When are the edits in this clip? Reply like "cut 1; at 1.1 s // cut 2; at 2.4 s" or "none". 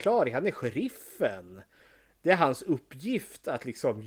none